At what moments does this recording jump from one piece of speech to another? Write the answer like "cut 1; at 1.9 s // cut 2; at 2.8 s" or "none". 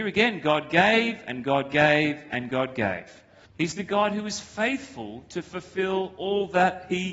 cut 1; at 3.5 s